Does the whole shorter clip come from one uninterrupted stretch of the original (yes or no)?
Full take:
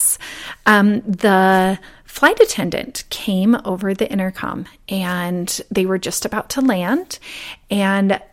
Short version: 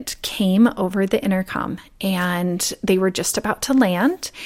yes